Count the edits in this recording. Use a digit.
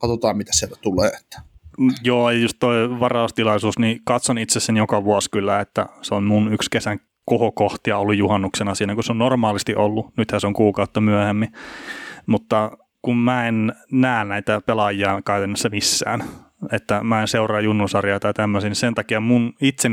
0